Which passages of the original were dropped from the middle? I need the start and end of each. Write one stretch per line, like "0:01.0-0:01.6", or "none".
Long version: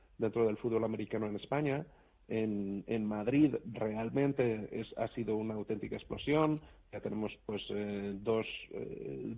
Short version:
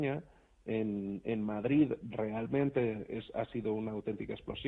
none